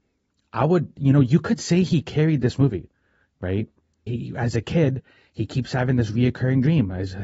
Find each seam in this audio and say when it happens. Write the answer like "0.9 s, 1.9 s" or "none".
4.1 s